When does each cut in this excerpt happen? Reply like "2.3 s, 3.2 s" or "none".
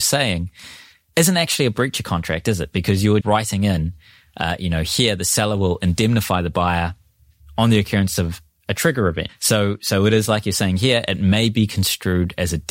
3.2 s, 9.3 s

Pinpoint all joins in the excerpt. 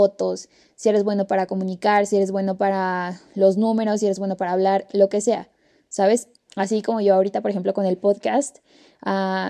6.4 s

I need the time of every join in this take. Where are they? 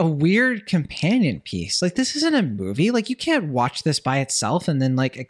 none

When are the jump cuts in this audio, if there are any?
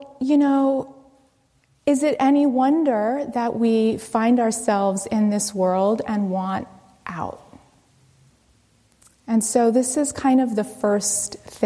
none

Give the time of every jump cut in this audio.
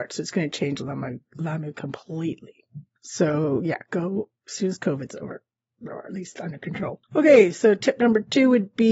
none

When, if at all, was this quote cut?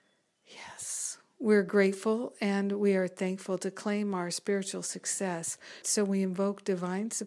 5.8 s

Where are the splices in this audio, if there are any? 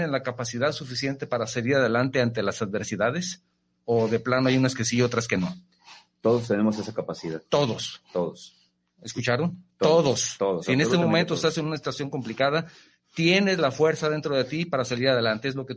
none

